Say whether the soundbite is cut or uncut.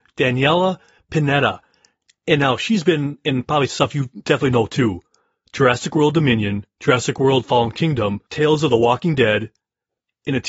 cut